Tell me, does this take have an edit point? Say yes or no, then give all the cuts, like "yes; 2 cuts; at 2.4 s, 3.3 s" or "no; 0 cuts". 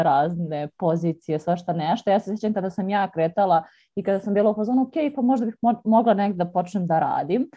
no; 0 cuts